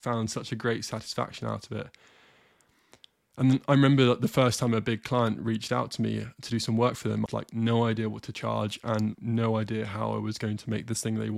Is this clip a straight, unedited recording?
no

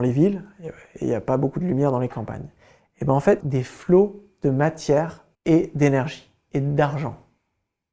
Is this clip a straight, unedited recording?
no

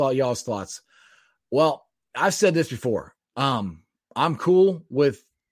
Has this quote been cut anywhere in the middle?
no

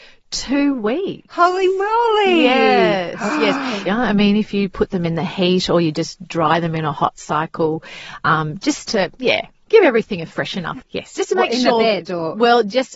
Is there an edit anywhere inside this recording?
yes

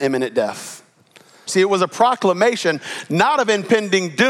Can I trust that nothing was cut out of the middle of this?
no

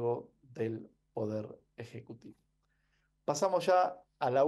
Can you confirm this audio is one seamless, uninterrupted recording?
yes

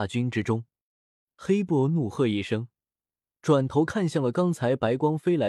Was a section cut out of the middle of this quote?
yes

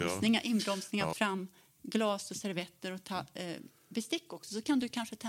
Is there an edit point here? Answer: yes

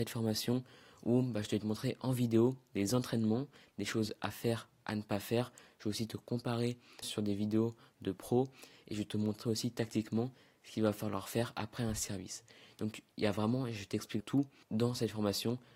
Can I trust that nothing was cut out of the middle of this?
no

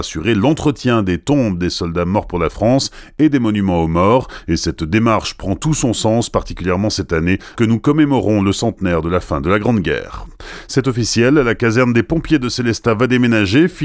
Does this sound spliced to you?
yes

